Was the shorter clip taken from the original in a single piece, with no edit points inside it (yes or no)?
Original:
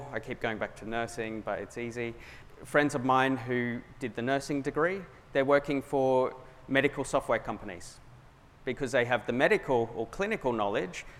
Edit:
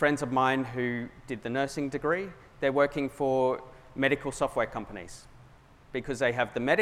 yes